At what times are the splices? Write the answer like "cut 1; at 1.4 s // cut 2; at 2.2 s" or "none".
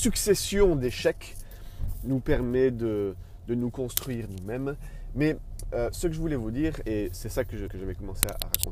cut 1; at 7.7 s